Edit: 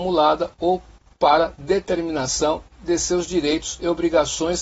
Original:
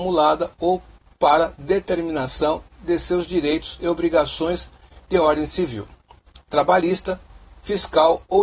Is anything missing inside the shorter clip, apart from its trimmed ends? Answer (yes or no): no